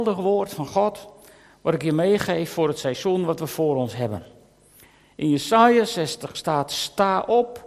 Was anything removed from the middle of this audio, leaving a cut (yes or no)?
no